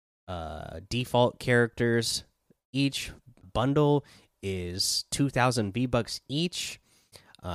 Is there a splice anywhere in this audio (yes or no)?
yes